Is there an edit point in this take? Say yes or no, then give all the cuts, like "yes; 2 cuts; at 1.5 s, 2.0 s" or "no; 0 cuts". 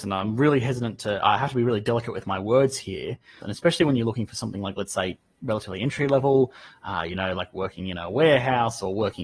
yes; 1 cut; at 3.4 s